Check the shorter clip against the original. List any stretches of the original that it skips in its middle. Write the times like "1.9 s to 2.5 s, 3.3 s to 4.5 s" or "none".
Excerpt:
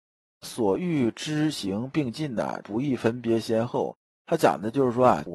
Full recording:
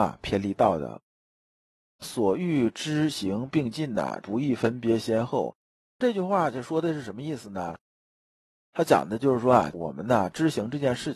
5.7 s to 8.6 s